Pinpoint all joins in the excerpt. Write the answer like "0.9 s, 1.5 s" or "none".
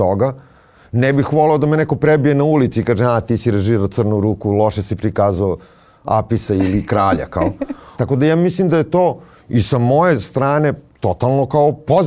8.0 s